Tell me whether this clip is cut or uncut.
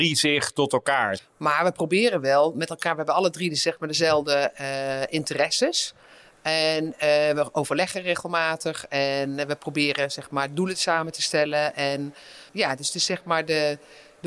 cut